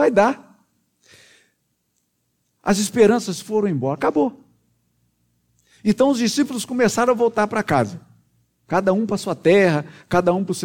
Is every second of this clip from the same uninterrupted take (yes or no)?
no